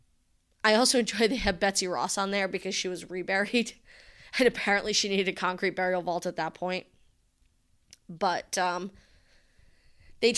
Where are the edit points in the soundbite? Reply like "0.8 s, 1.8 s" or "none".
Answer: none